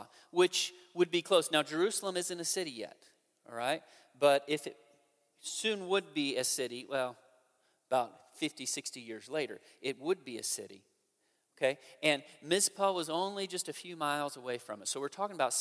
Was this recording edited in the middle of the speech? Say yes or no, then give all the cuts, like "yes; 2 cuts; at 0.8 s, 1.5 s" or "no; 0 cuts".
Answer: no; 0 cuts